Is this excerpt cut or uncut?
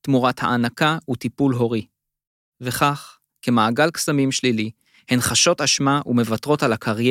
uncut